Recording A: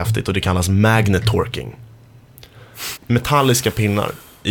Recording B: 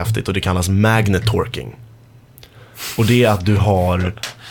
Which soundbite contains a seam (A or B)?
A